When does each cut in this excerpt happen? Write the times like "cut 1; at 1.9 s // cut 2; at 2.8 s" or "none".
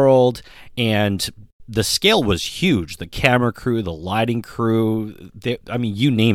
none